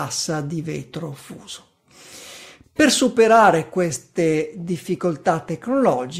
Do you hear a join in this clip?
yes; 1 cut; at 2.6 s

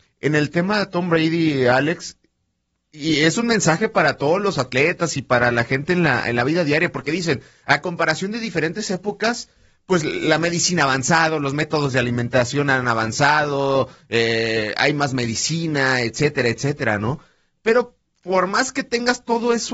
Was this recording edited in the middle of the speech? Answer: no; 0 cuts

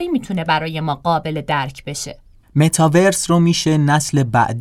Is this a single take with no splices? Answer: no; 1 cut; at 2.4 s

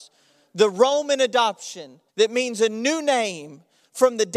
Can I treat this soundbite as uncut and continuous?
no; 1 cut; at 2.1 s

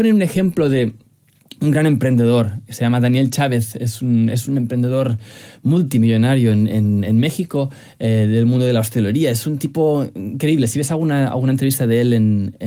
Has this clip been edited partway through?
no; 0 cuts

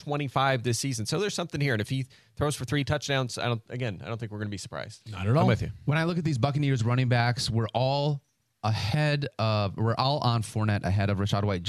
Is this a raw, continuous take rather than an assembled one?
yes; 0 cuts

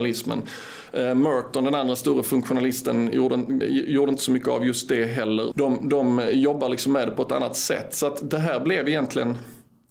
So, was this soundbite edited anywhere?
yes; 2 cuts; at 3.6 s, 5.5 s

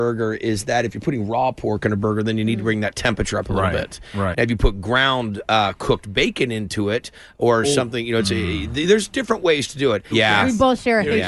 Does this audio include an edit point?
yes; 2 cuts; at 4.3 s, 10.1 s

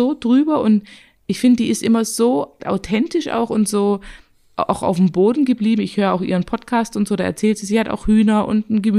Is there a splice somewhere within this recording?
yes; 1 cut; at 2.6 s

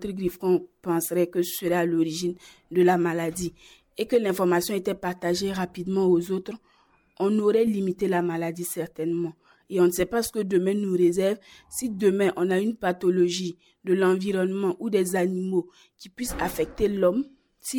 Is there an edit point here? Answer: no; 0 cuts

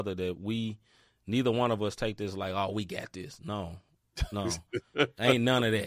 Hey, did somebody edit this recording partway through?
no; 0 cuts

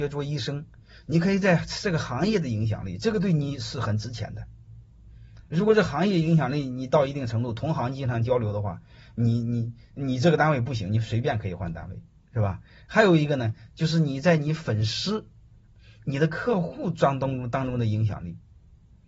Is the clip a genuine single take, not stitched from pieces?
yes; 0 cuts

